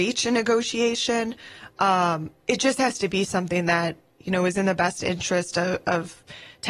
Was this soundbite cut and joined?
no; 0 cuts

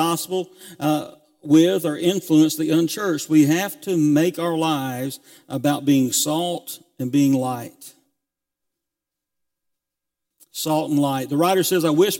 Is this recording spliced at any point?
no; 0 cuts

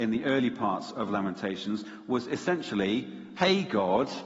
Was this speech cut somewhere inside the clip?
yes; 1 cut; at 3.4 s

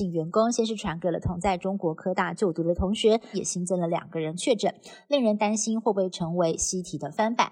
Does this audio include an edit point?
yes; 1 cut; at 3.3 s

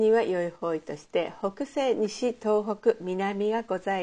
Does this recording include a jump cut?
no; 0 cuts

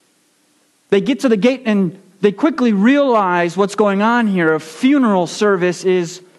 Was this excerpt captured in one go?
yes; 0 cuts

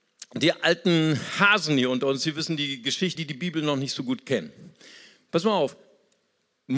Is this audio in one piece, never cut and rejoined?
no; 1 cut; at 3.2 s

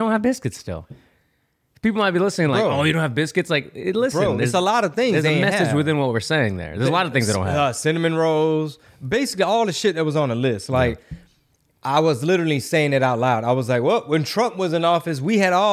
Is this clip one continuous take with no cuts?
yes; 0 cuts

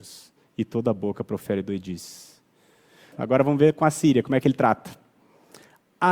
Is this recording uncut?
no; 1 cut; at 3.1 s

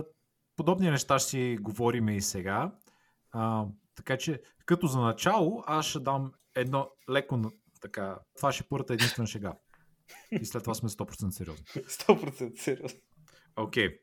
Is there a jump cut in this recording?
yes; 3 cuts; at 6.4 s, 8.4 s, 10.3 s

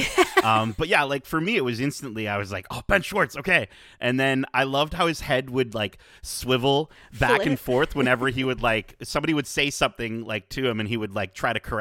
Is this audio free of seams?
yes; 0 cuts

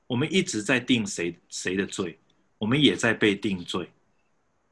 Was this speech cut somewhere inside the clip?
no; 0 cuts

